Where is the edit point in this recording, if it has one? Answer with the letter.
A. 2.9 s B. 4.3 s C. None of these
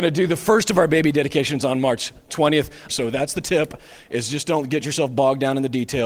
A